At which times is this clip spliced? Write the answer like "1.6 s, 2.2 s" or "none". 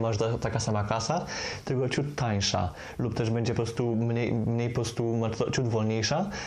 none